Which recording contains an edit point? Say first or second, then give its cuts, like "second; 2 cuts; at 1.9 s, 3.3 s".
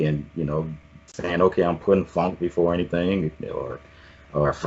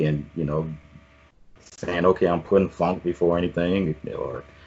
first; 1 cut; at 1.1 s